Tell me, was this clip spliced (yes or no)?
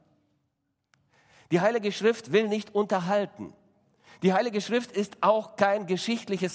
no